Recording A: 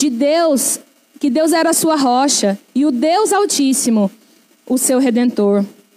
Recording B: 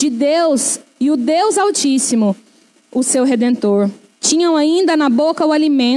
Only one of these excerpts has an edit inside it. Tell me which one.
B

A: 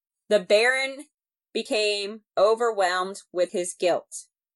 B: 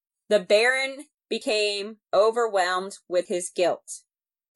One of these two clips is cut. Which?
B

